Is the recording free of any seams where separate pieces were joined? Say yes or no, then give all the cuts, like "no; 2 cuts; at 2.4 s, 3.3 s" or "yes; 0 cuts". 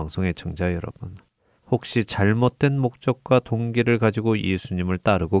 no; 1 cut; at 1.6 s